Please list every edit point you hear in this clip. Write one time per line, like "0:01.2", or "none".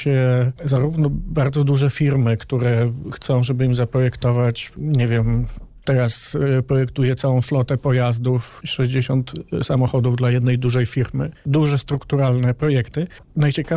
0:11.4